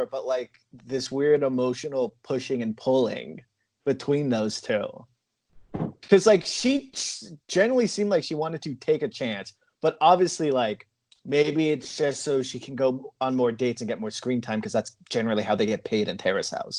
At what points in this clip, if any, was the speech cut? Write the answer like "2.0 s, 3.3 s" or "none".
none